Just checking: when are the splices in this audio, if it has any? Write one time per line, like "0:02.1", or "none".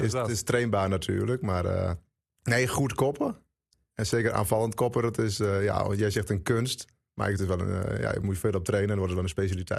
none